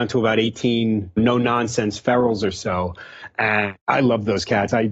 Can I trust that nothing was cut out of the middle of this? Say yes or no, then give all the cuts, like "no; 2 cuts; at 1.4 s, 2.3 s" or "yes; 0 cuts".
no; 1 cut; at 3.8 s